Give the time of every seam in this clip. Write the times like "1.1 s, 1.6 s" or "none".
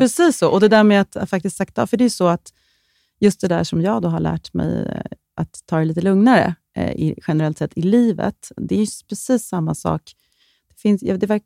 8.6 s